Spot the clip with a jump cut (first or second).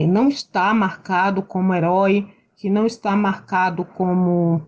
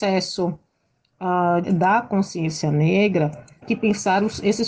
second